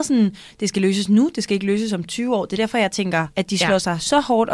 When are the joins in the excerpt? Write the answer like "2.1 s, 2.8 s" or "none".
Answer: none